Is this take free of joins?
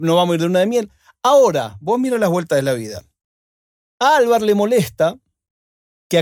yes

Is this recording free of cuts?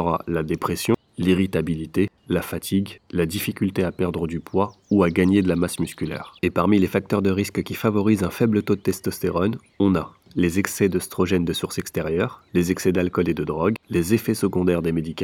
no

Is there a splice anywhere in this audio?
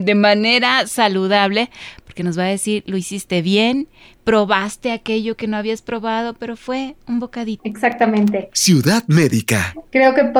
no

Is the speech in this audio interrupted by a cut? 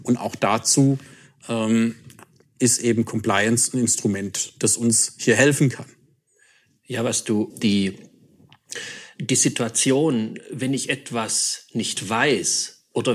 yes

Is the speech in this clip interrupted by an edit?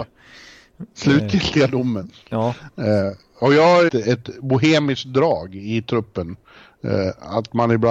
yes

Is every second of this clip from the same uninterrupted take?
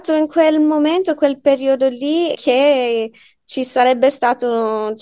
no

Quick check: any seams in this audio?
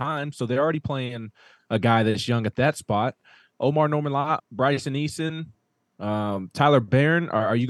yes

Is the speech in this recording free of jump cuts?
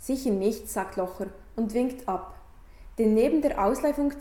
yes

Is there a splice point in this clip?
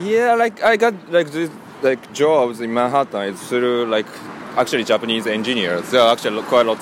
no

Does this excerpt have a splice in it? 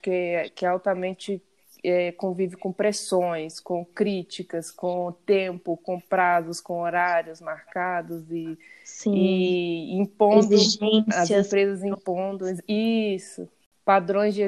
no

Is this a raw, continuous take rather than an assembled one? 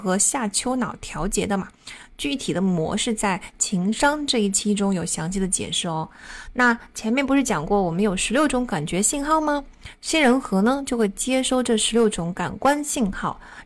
yes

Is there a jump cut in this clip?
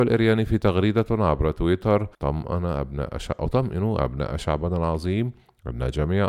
yes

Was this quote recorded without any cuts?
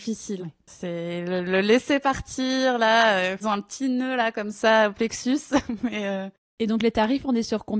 yes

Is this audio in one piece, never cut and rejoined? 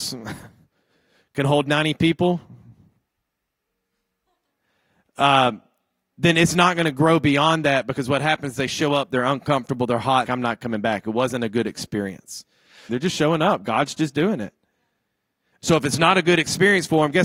no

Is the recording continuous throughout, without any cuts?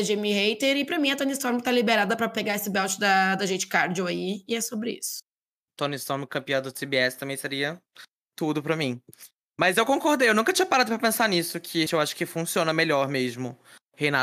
no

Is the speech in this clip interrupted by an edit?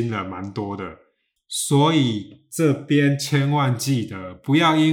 yes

